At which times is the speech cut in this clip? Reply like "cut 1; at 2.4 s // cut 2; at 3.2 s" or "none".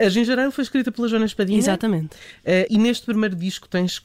cut 1; at 2.7 s